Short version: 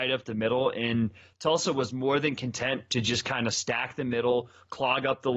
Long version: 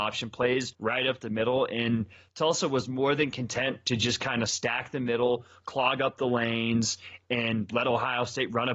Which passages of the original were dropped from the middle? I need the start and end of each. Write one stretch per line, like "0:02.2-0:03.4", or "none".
none